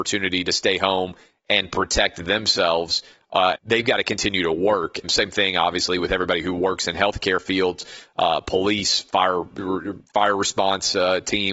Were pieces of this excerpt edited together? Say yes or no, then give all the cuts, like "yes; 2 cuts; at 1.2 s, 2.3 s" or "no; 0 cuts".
yes; 2 cuts; at 3.5 s, 5.0 s